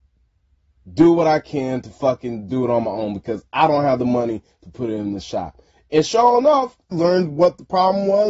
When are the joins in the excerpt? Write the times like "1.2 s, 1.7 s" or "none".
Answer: 6.9 s